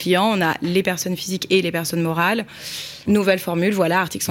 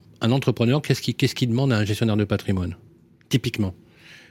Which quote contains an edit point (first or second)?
first